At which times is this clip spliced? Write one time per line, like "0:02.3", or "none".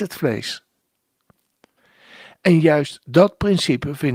none